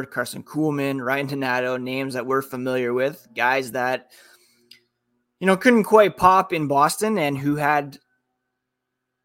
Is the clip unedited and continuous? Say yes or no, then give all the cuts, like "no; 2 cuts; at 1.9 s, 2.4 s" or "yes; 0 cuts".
yes; 0 cuts